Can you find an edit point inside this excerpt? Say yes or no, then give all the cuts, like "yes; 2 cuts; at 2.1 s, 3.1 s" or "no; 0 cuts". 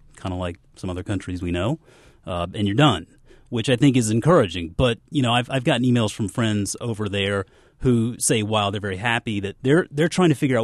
yes; 1 cut; at 9.6 s